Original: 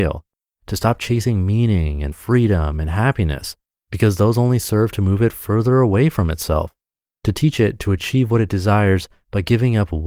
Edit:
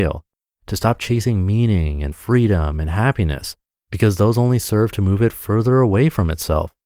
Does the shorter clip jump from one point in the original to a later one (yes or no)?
no